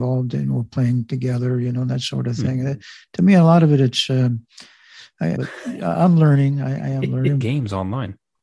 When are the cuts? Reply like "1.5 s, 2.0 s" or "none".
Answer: 5.4 s, 7.4 s